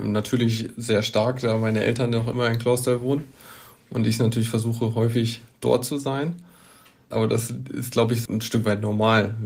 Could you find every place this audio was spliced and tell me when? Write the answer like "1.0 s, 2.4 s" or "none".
7.1 s, 8.3 s